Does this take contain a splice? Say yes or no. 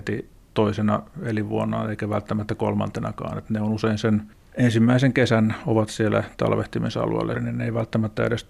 yes